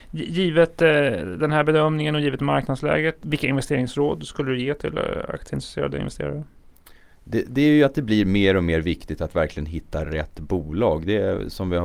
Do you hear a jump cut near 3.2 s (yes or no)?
yes